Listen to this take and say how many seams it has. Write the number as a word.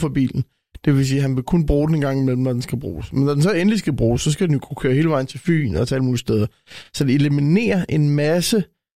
zero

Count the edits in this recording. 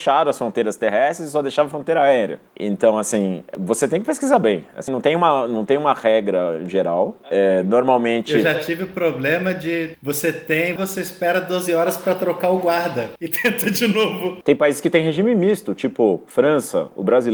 two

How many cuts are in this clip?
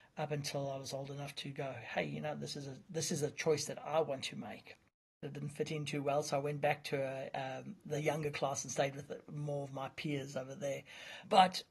one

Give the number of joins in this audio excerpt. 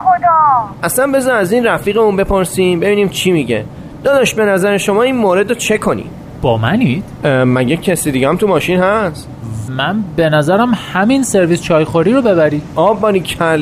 one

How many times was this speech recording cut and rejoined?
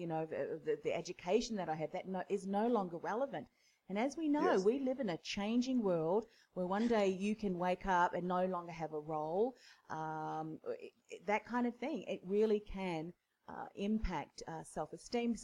zero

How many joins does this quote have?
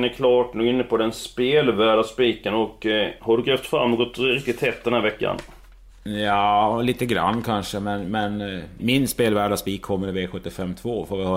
two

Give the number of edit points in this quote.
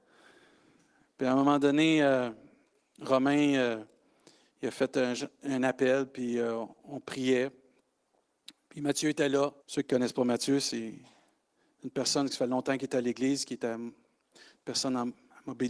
one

